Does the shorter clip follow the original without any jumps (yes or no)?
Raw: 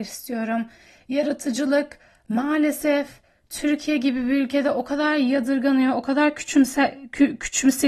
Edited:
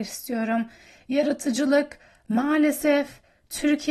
yes